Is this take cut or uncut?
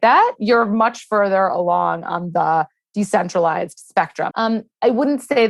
cut